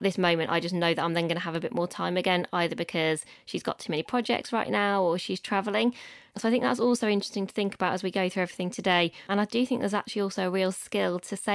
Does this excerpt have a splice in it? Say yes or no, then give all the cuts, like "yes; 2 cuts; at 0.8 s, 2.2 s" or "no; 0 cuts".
yes; 1 cut; at 9.3 s